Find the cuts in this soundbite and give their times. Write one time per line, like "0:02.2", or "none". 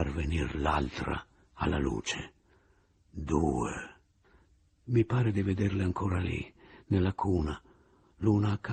none